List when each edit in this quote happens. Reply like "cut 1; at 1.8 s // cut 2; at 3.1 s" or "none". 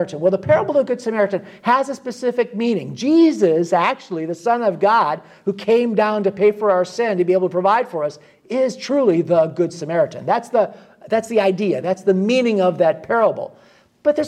none